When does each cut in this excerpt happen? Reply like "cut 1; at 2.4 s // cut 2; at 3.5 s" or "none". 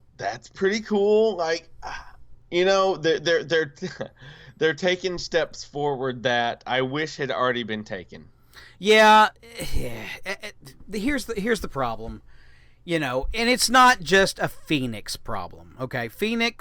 none